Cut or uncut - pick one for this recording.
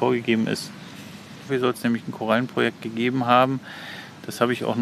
cut